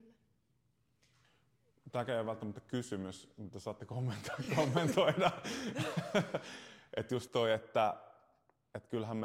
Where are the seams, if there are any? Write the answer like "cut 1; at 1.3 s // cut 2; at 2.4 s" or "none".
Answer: none